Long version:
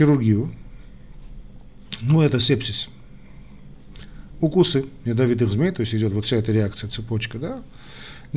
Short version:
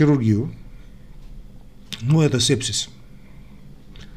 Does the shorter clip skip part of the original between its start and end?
no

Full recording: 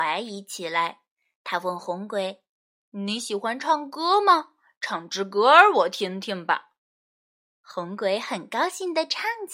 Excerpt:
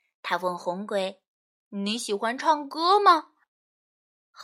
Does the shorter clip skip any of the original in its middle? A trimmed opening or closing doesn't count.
yes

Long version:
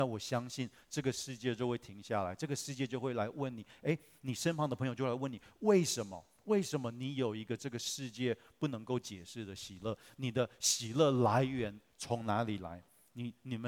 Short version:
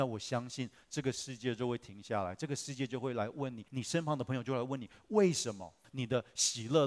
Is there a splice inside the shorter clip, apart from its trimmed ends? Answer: yes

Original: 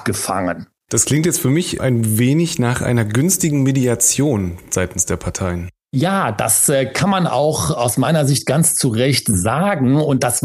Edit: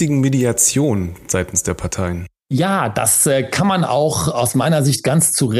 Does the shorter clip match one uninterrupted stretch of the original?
yes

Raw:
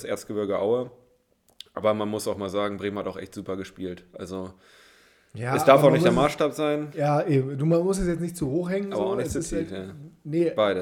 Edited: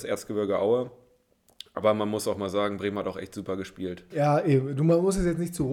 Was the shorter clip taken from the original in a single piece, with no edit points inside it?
no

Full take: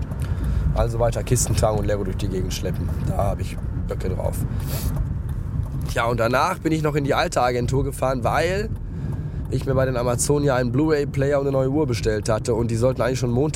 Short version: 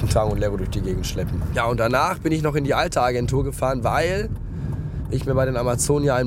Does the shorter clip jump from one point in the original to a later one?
yes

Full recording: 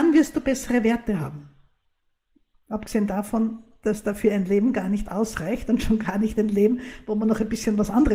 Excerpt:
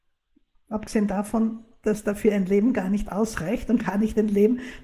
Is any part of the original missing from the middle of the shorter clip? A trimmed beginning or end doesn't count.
yes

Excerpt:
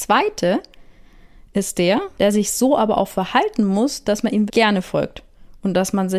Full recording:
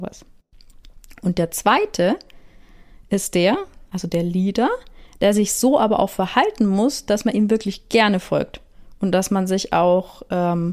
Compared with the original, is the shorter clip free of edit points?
no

